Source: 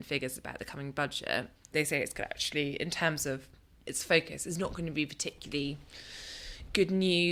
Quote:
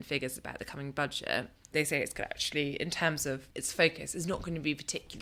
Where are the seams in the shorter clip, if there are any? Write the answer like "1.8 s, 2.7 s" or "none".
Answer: 3.5 s